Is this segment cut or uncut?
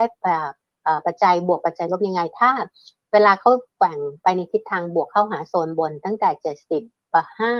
uncut